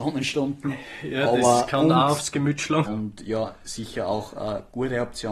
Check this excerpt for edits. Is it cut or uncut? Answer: cut